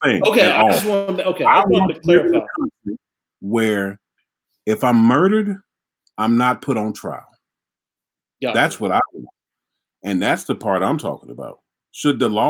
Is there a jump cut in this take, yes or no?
no